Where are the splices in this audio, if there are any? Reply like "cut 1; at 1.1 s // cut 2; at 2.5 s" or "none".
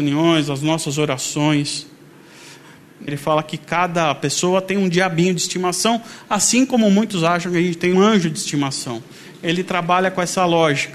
cut 1; at 3.1 s // cut 2; at 7.9 s